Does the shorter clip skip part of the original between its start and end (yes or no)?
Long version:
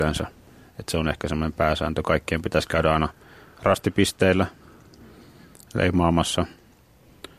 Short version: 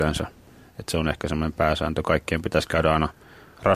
no